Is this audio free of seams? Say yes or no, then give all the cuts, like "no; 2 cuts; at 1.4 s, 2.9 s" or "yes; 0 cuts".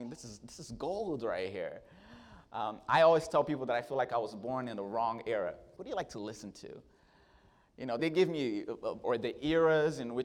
no; 3 cuts; at 5.8 s, 8.0 s, 9.0 s